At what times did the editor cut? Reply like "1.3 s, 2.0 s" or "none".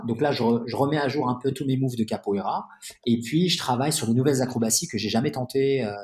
none